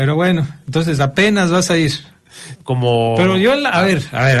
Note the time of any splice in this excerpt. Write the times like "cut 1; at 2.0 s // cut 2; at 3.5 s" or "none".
cut 1; at 2.6 s

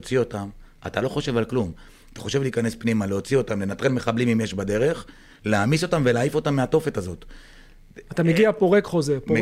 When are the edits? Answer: none

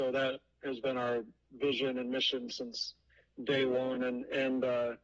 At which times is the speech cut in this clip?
none

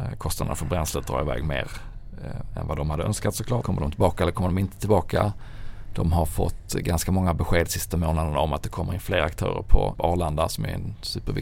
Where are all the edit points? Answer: cut 1; at 3.6 s // cut 2; at 9.9 s

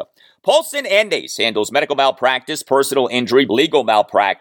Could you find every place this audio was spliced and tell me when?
cut 1; at 3.5 s

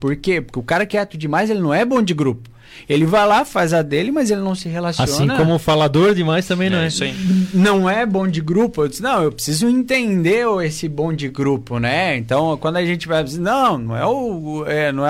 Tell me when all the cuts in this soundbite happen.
none

